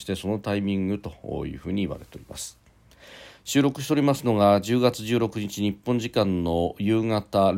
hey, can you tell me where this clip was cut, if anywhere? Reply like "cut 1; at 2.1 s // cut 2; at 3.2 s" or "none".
none